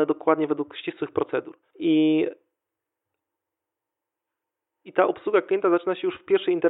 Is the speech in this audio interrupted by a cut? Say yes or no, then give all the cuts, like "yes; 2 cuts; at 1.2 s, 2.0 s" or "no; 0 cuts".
yes; 1 cut; at 1.7 s